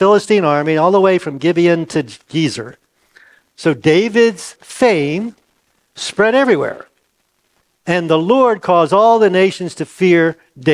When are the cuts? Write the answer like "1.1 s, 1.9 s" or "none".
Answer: 4.6 s